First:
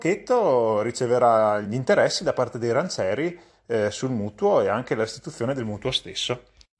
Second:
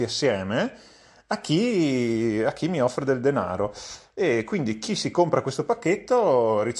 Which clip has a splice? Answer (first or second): first